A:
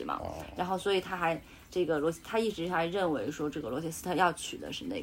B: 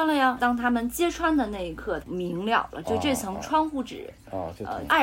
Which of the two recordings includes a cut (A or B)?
B